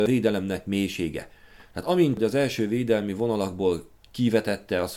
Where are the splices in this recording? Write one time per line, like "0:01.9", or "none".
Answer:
none